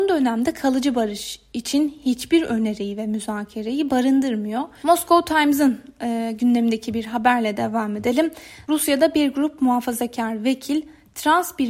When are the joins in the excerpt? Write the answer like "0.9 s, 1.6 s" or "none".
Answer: 4.8 s